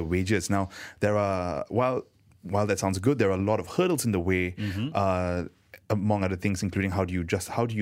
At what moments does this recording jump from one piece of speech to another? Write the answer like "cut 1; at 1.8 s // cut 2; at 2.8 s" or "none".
none